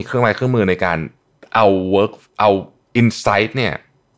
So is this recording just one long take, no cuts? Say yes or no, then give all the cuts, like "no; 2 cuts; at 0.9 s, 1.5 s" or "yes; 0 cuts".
yes; 0 cuts